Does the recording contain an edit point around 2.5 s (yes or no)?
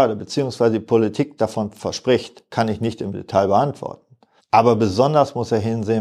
yes